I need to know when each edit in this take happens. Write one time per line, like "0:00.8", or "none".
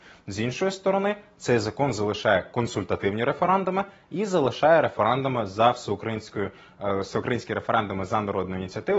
none